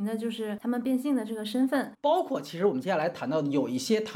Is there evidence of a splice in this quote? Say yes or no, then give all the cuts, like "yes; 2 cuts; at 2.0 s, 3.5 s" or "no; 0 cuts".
yes; 1 cut; at 1.9 s